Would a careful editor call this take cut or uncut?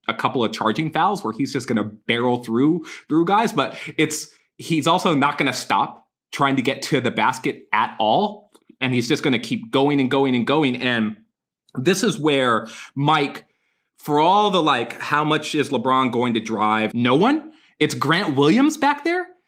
cut